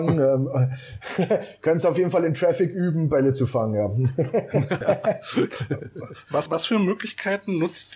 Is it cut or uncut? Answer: cut